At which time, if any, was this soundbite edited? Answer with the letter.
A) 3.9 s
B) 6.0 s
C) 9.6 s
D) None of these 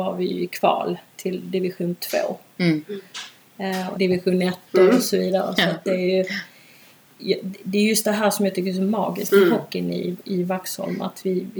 A